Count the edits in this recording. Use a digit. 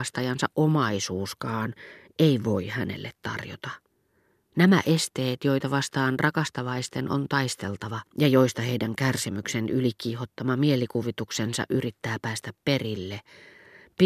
2